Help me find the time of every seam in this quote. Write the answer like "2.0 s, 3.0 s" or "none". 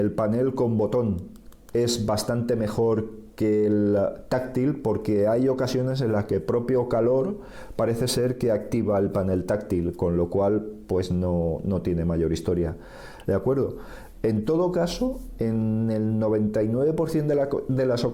13.3 s